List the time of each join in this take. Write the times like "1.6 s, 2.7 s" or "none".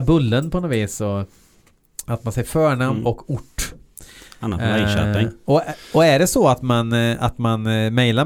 none